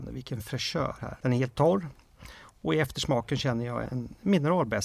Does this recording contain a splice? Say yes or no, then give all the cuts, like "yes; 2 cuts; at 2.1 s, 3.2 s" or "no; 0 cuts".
yes; 2 cuts; at 1.2 s, 3.9 s